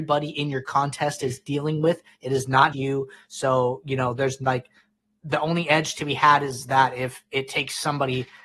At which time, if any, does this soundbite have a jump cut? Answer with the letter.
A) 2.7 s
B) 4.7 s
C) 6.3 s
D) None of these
A